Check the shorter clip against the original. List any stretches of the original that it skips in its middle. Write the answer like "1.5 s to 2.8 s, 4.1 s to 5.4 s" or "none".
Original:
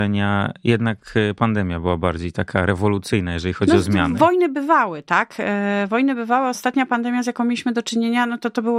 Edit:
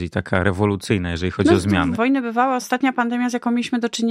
4.2 s to 5.9 s